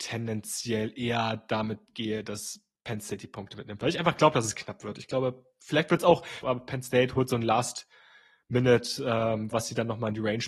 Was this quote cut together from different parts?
yes; 2 cuts; at 6.4 s, 9.5 s

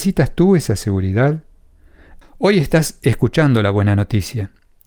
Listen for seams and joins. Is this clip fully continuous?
no; 1 cut; at 2.2 s

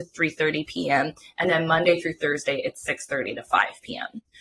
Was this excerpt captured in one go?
yes; 0 cuts

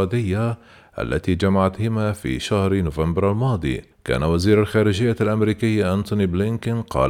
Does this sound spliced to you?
yes; 1 cut; at 3.9 s

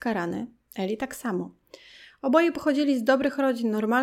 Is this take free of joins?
yes; 0 cuts

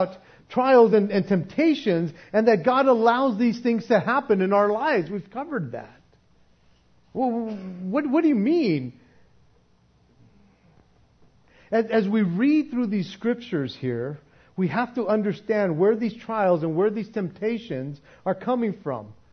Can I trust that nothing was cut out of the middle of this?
yes; 0 cuts

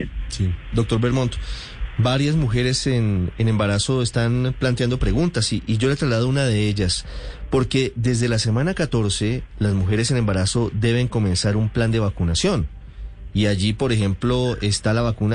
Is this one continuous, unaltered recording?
yes; 0 cuts

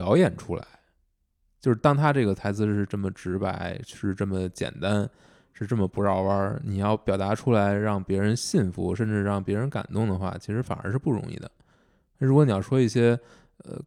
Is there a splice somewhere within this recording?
no; 0 cuts

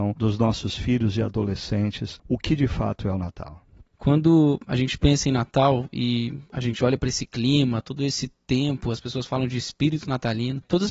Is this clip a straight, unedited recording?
yes; 0 cuts

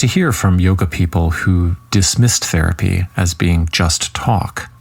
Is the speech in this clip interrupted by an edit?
no; 0 cuts

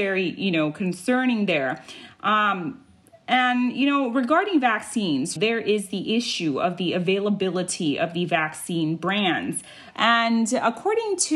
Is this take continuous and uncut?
no; 2 cuts; at 5.4 s, 9.9 s

